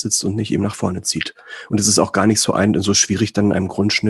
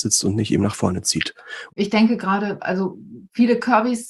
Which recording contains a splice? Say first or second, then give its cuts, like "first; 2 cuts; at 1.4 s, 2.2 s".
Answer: second; 1 cut; at 1.7 s